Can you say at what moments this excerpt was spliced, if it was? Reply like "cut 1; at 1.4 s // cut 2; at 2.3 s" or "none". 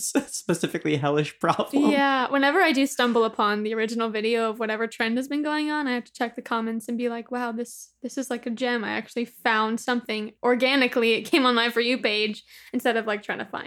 cut 1; at 10.4 s